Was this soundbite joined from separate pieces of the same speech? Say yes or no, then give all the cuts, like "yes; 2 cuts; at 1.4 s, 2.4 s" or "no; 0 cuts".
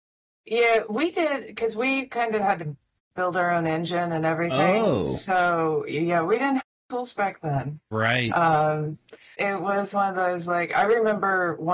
yes; 1 cut; at 9.4 s